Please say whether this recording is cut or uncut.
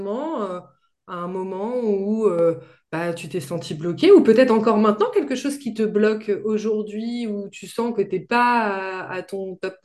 uncut